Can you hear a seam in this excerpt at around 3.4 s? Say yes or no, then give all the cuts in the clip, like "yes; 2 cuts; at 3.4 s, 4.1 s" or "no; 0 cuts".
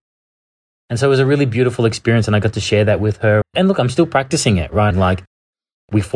yes; 2 cuts; at 3.4 s, 4.9 s